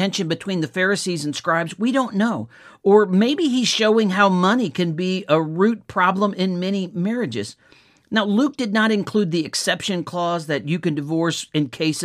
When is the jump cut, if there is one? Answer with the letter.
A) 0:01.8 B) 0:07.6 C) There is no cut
C